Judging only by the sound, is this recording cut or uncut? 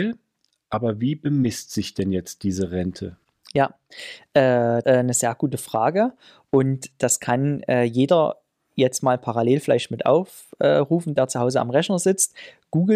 cut